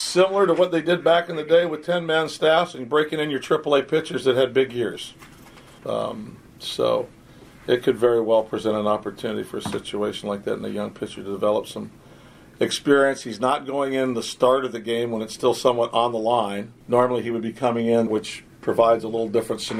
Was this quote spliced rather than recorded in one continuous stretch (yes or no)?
yes